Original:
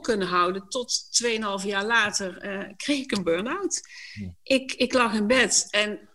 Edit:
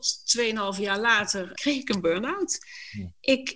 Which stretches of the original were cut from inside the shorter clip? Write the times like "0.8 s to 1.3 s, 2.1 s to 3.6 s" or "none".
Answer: 2.4 s to 2.8 s